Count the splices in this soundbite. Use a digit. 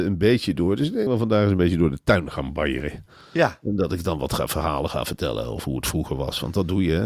1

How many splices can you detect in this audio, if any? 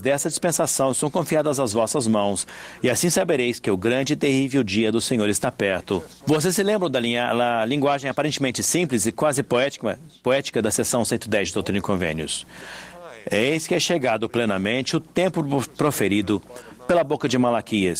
1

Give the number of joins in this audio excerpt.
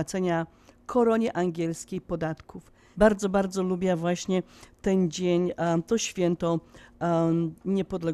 1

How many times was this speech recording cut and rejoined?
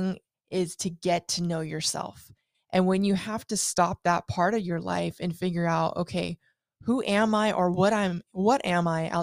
1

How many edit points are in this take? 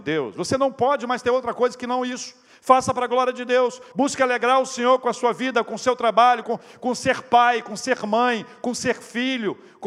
2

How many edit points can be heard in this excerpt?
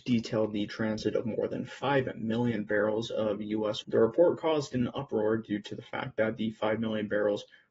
1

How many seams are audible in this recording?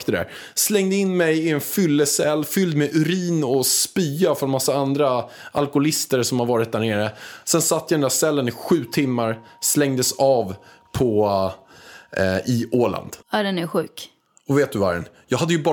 1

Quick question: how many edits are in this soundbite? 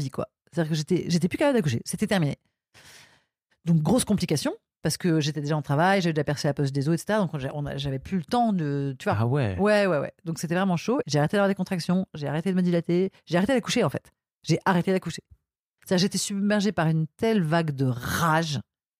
1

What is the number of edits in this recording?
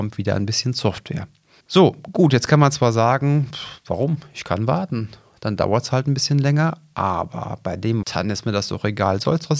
2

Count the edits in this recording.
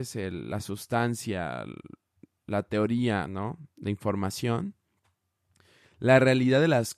0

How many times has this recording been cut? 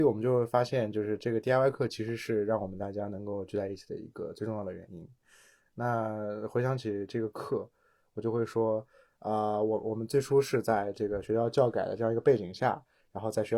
0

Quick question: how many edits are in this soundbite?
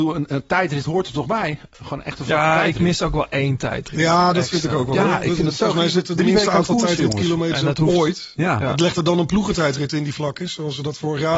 0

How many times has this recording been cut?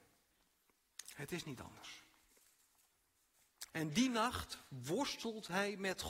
1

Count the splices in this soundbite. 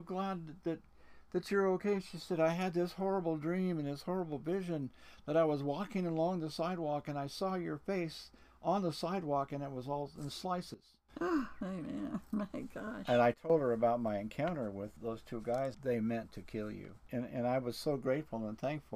1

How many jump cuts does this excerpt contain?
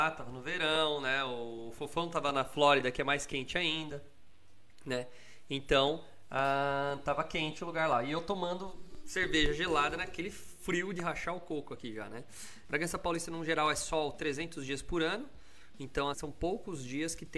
2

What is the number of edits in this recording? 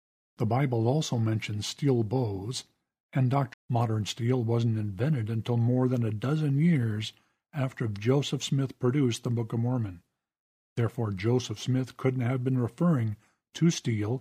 1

